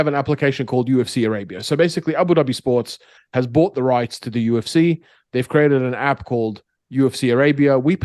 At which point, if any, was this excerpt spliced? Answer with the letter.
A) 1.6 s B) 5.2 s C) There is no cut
C